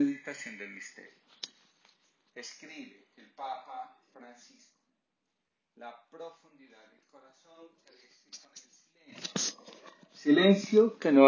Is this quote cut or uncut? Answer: uncut